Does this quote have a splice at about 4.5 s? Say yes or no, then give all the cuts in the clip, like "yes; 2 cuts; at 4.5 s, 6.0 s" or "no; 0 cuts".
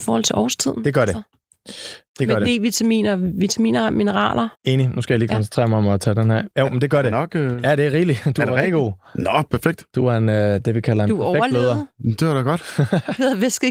yes; 1 cut; at 4.5 s